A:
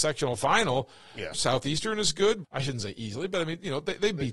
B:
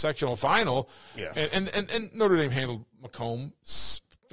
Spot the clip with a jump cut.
A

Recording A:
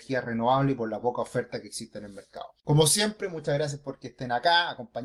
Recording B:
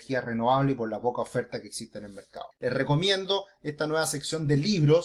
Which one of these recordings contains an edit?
B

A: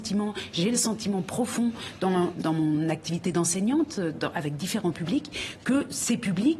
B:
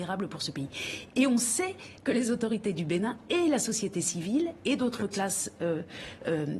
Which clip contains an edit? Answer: A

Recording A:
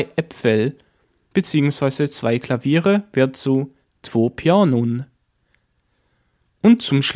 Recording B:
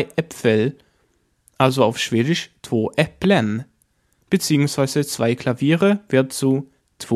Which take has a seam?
A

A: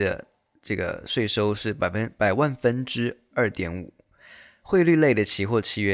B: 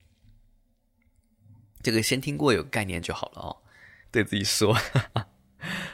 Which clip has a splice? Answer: B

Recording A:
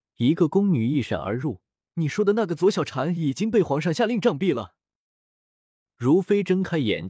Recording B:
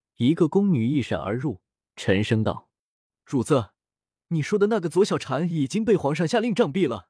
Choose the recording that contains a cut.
A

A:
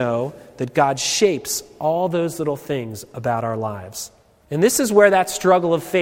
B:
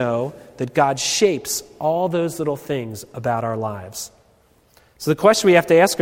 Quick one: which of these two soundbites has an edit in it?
A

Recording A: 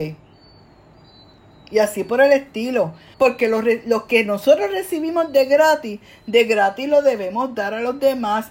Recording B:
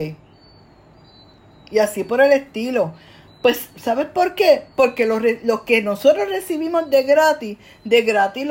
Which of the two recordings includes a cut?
A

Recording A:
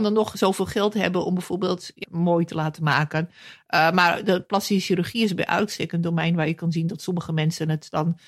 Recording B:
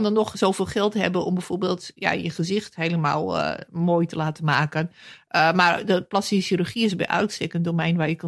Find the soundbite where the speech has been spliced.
A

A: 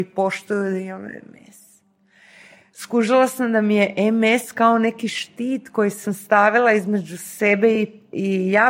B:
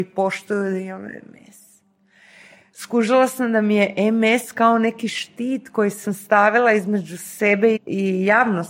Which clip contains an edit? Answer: B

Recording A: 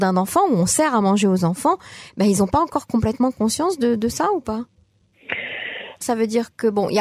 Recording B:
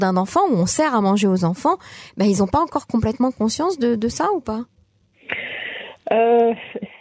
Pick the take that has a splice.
A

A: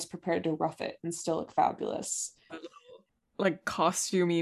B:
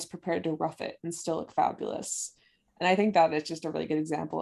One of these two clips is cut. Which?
A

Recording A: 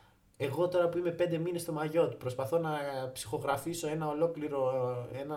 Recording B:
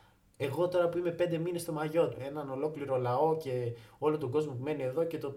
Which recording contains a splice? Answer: B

